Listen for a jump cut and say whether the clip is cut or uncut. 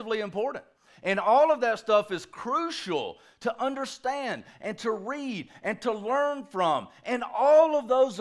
uncut